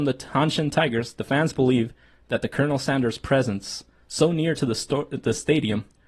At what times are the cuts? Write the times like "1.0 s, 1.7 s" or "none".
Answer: none